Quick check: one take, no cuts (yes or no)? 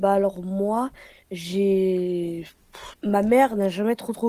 no